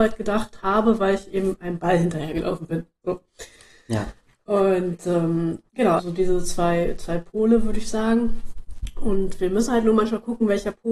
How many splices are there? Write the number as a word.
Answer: one